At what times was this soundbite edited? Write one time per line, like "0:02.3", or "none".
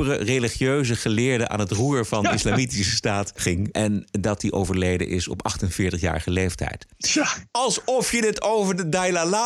none